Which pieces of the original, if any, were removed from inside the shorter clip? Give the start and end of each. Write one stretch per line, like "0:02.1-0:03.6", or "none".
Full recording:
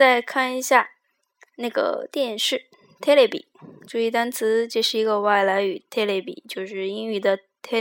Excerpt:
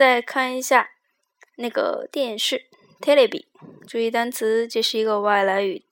none